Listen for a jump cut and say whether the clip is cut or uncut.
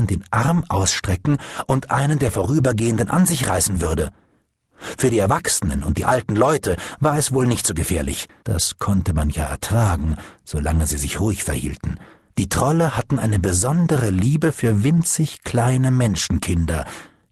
cut